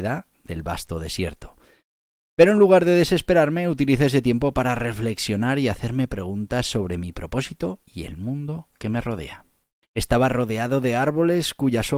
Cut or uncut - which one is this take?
cut